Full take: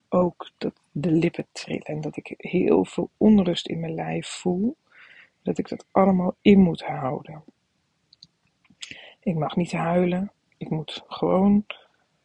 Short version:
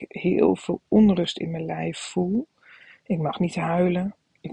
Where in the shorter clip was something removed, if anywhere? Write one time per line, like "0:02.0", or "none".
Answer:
0:03.0